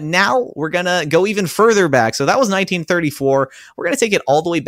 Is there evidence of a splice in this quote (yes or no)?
no